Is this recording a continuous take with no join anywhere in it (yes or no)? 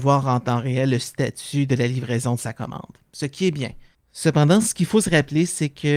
yes